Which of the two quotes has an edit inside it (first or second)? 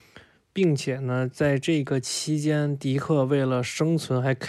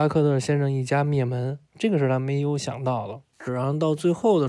second